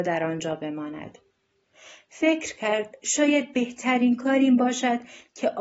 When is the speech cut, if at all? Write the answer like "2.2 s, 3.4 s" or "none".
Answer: none